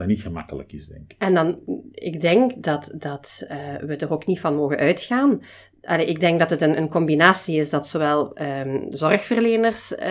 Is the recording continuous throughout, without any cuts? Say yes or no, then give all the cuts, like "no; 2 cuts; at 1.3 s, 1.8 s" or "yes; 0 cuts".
yes; 0 cuts